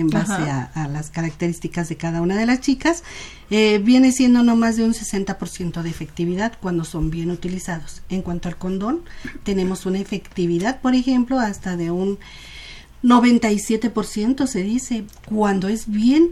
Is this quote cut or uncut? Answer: uncut